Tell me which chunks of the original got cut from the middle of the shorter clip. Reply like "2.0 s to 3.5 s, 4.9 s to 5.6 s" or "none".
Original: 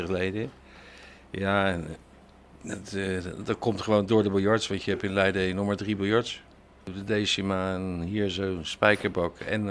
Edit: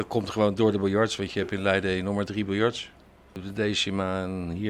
none